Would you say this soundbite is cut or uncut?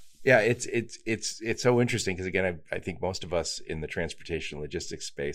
uncut